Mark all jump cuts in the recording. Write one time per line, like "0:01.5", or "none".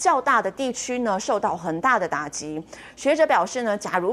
none